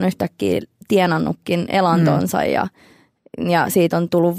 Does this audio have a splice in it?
no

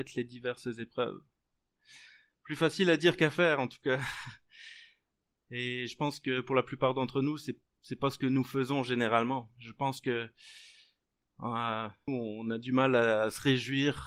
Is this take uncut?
no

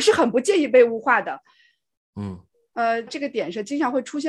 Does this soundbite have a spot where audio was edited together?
yes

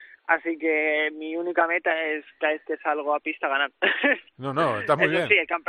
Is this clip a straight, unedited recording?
yes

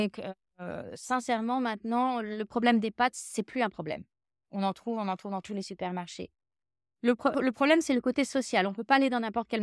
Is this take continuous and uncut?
no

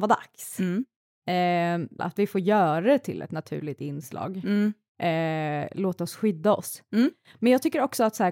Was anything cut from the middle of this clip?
yes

